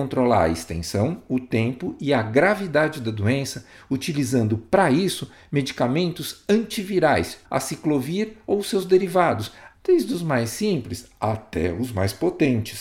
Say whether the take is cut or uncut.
cut